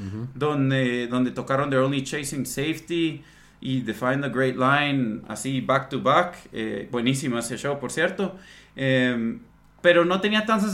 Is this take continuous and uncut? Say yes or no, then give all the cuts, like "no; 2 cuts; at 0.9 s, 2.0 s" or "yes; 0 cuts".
yes; 0 cuts